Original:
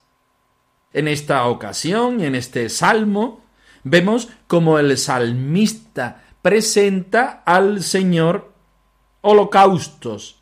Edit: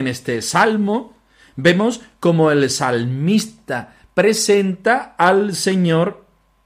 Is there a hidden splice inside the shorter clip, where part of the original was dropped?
no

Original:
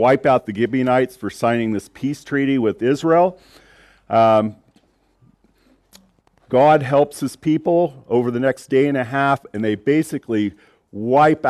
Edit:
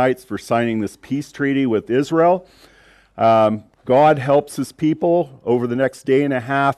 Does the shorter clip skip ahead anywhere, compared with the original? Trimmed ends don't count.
yes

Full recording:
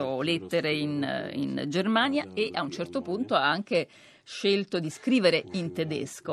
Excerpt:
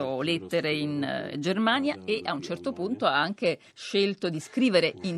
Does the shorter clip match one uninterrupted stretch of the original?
no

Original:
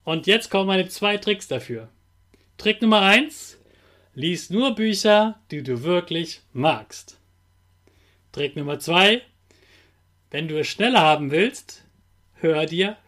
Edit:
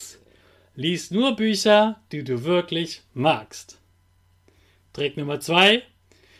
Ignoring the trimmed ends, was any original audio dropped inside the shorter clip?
no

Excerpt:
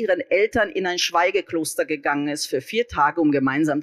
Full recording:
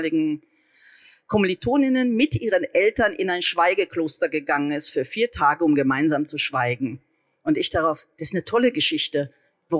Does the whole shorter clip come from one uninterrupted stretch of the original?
yes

